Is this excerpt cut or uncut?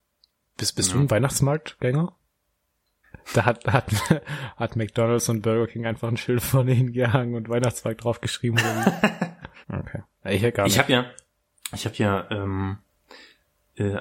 cut